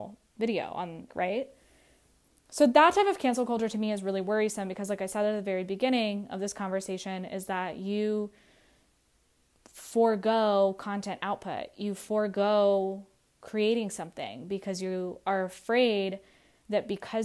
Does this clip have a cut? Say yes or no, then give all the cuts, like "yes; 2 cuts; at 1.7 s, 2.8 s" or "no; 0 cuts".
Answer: yes; 1 cut; at 1.1 s